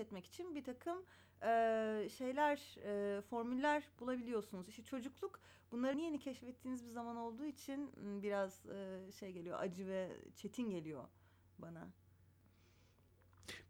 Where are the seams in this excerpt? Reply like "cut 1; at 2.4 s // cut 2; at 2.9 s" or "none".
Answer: cut 1; at 5.9 s